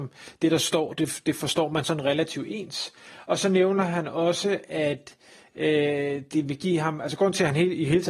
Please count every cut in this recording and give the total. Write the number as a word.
zero